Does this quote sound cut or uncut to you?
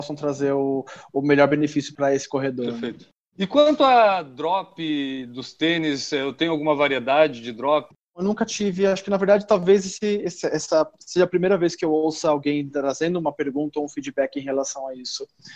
cut